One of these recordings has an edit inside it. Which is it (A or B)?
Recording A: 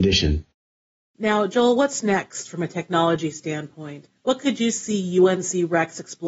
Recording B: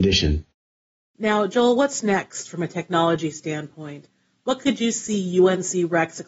A